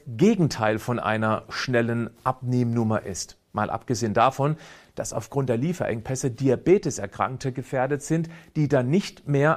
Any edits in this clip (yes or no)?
no